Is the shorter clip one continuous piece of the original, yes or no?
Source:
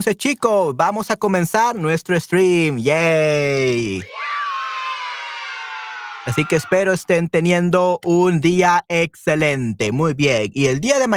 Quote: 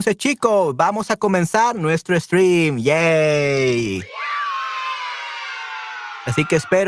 yes